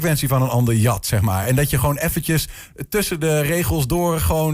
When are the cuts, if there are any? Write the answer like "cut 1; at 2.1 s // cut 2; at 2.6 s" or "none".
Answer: none